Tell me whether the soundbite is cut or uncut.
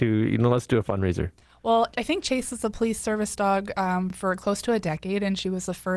uncut